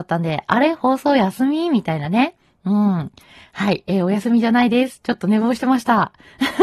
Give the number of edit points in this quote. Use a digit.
0